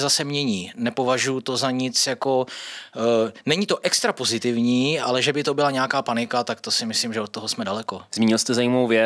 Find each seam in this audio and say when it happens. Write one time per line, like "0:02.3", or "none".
0:08.1

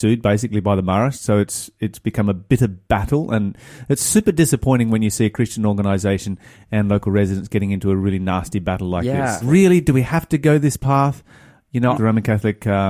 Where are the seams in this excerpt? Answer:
0:09.4
0:11.9

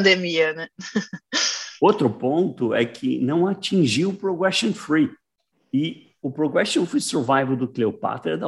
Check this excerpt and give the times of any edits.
0:05.5

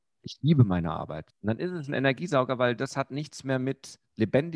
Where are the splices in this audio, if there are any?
0:01.3

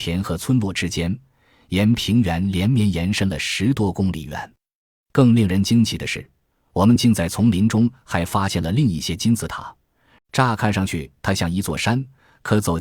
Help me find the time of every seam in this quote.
0:10.2

